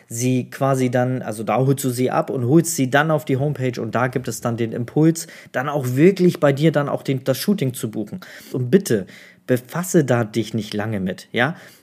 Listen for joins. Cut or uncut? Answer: cut